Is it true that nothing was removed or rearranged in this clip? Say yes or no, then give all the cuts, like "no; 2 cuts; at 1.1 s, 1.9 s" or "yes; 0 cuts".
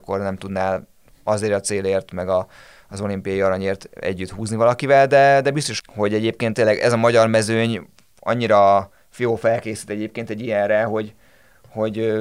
no; 1 cut; at 5.8 s